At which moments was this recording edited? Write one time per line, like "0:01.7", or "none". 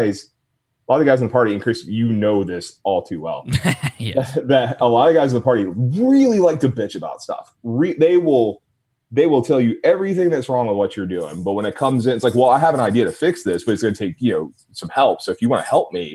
none